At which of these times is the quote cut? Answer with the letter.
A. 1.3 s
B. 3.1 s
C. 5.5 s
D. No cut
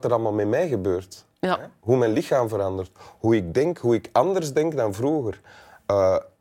D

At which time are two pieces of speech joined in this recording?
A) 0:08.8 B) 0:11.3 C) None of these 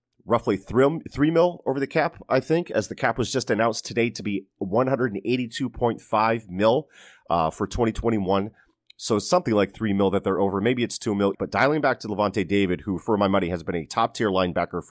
B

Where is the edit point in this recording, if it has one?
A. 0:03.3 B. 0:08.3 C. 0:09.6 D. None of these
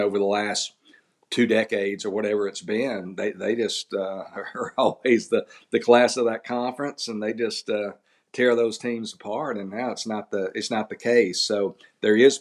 D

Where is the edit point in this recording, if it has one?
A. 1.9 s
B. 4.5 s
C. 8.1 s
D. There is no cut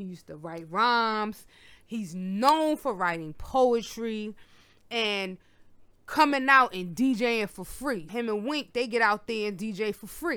C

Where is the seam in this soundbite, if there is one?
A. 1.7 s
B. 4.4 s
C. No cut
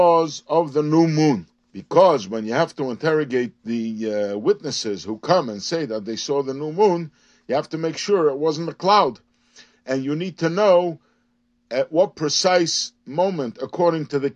A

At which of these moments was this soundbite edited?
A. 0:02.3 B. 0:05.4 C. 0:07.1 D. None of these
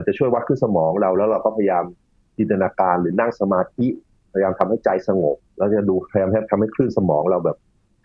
B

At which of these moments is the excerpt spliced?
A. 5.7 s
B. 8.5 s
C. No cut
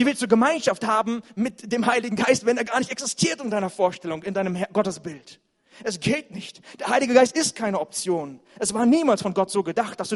C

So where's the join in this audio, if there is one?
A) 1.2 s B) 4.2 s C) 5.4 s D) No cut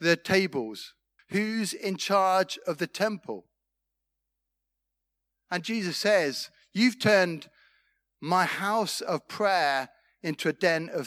A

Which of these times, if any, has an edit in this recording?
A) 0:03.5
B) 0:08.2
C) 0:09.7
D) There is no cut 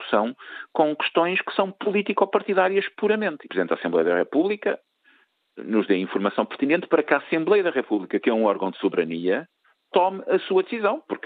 A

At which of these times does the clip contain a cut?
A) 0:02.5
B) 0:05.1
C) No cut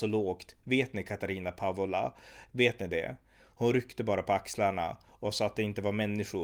A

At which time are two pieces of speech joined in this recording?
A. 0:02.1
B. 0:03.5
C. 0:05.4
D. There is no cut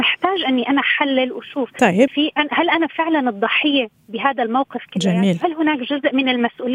A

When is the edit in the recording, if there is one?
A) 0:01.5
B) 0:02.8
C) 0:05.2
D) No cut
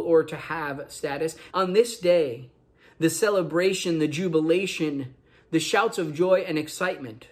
A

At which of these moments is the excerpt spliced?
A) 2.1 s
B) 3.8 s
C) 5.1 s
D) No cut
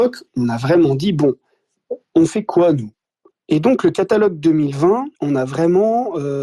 C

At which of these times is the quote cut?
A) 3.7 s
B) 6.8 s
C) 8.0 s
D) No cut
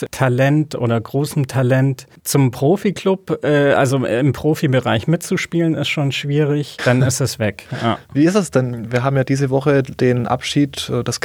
B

